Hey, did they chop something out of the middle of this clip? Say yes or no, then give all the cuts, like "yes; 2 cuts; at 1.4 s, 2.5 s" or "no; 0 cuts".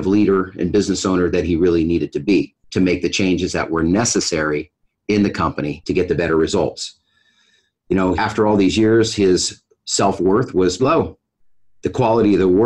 yes; 2 cuts; at 8.2 s, 10.8 s